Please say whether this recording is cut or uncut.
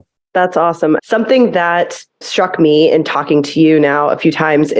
cut